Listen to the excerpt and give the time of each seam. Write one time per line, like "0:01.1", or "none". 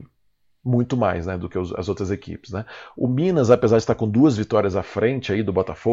none

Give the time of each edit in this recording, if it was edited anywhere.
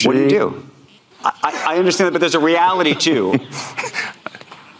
0:01.1

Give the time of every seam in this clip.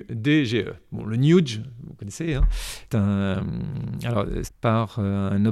0:02.9
0:04.4

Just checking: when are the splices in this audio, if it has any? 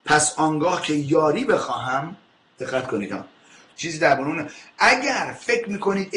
0:03.7

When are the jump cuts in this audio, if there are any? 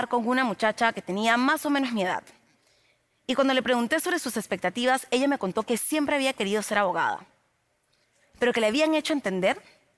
none

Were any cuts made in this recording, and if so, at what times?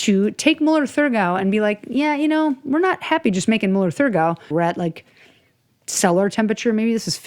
0:04.5

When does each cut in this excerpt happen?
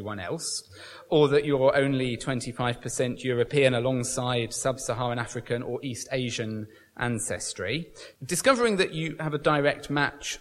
0:08.1

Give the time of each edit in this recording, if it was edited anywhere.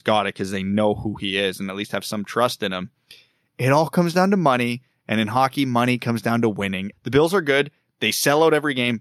0:06.9

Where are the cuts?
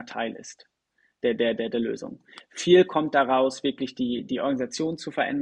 none

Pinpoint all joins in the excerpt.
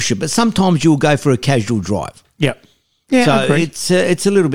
none

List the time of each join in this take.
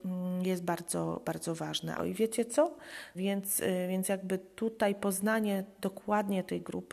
0:02.0
0:03.1

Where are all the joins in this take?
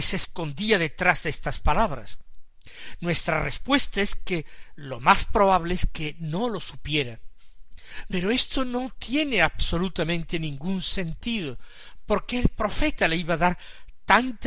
0:08.1

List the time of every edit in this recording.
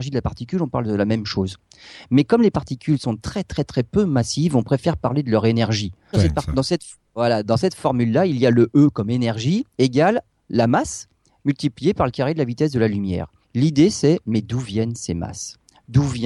0:06.1
0:13.4

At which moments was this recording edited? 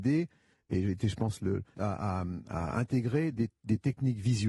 0:01.7

